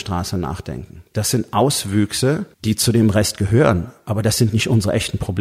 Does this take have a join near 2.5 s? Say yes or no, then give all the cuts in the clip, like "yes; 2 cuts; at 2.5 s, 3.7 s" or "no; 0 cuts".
yes; 1 cut; at 2.5 s